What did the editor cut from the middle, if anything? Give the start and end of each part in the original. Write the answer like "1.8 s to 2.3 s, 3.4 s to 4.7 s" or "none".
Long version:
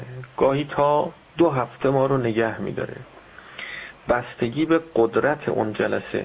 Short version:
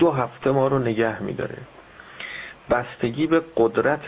none